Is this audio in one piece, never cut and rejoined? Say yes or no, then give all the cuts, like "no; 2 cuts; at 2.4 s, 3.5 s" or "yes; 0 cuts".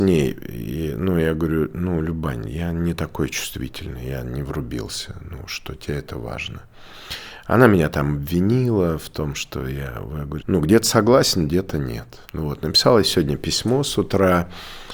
no; 2 cuts; at 10.4 s, 12.3 s